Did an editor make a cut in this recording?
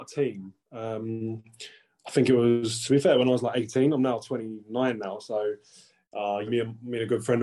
yes; 1 cut; at 6.5 s

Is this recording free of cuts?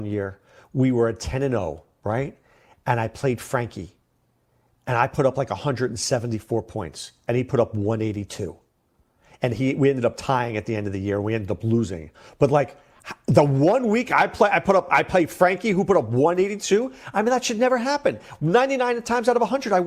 yes; 0 cuts

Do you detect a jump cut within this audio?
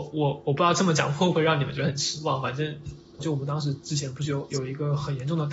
yes; 1 cut; at 3.2 s

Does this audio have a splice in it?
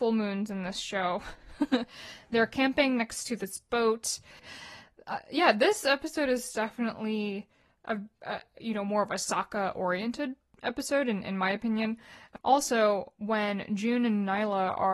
yes; 2 cuts; at 4.4 s, 12.4 s

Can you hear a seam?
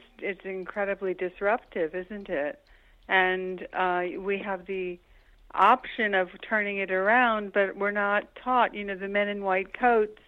no; 0 cuts

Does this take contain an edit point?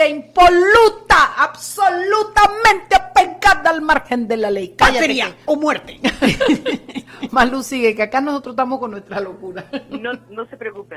no; 0 cuts

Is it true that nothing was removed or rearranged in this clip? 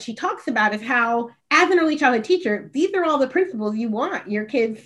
no; 1 cut; at 1.4 s

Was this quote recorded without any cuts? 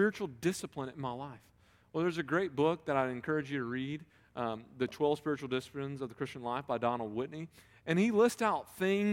yes; 0 cuts

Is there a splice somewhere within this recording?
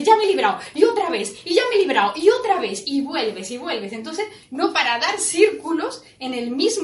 yes; 1 cut; at 4.4 s

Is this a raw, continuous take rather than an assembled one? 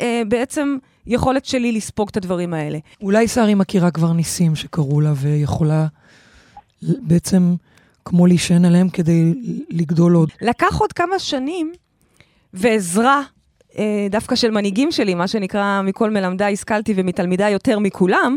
no; 2 cuts; at 2.9 s, 10.3 s

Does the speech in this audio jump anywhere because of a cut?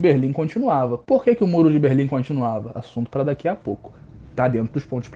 no; 0 cuts

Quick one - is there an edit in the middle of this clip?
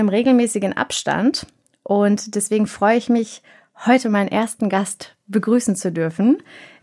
no; 0 cuts

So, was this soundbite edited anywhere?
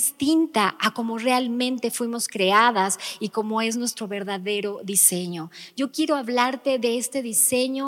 no; 0 cuts

